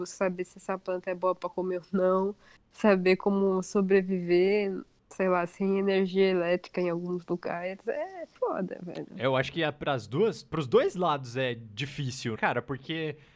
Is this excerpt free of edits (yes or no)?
no